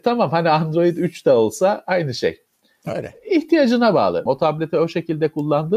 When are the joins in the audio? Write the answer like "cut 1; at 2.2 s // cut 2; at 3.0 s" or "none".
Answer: cut 1; at 4.3 s